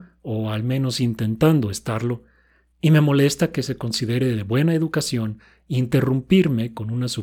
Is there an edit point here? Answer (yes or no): no